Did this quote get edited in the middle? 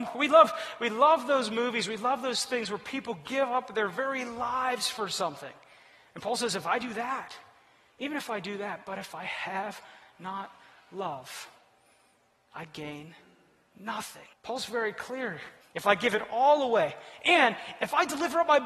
yes; 2 cuts; at 14.3 s, 15.6 s

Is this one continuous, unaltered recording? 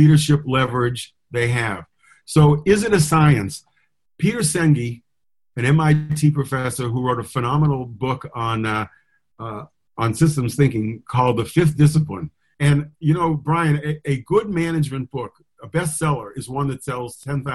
yes; 0 cuts

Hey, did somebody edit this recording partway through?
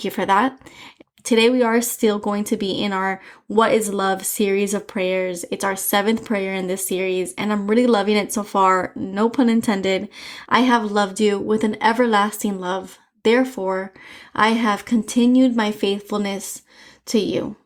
yes; 1 cut; at 10.4 s

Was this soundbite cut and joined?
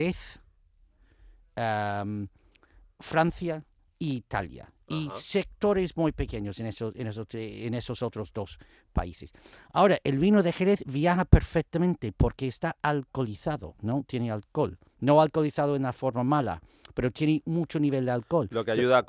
no; 0 cuts

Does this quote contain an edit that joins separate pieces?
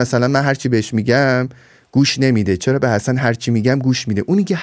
no; 0 cuts

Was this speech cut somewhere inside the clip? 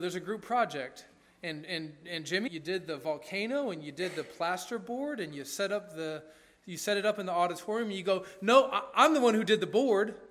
yes; 1 cut; at 2.5 s

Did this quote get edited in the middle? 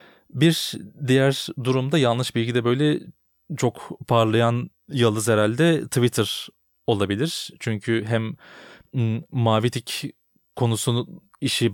no; 0 cuts

